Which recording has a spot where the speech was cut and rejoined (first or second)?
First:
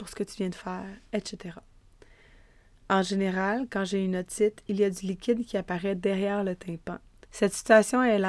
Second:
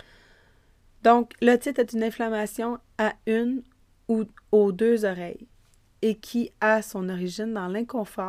first